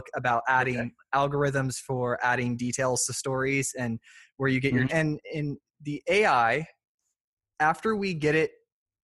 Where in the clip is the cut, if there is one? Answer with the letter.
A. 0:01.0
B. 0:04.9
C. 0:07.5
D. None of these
B